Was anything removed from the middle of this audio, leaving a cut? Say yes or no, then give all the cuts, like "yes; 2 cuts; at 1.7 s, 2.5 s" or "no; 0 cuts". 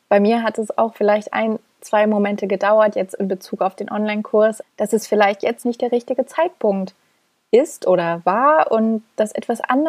yes; 2 cuts; at 4.6 s, 5.6 s